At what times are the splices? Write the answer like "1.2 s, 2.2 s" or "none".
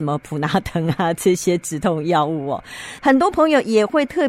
3.0 s